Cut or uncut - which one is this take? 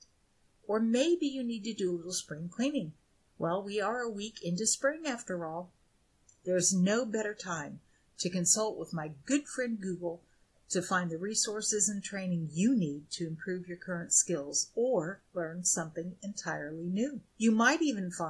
uncut